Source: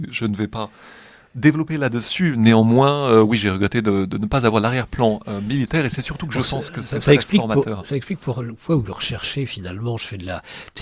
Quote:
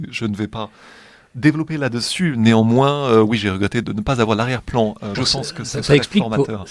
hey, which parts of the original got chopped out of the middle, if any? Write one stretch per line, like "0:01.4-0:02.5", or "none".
0:03.8-0:04.1
0:05.4-0:06.3